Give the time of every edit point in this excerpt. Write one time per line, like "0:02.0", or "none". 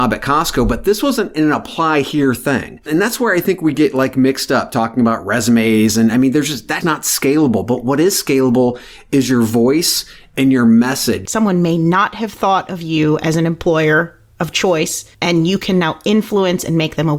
0:06.8
0:11.3